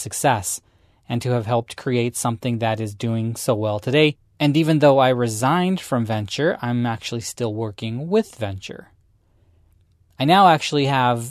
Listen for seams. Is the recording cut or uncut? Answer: uncut